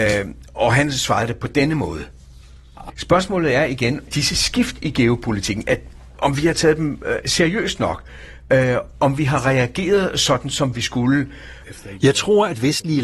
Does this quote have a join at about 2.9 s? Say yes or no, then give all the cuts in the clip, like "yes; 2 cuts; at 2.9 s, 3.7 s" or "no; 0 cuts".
yes; 3 cuts; at 2.9 s, 4.1 s, 11.6 s